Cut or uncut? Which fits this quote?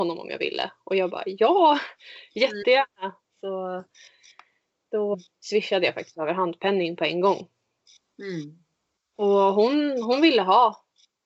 cut